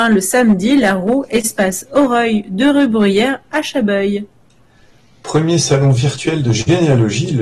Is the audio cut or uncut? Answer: uncut